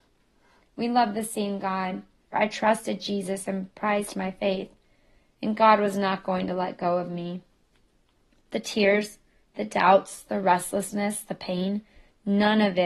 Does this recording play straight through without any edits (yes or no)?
no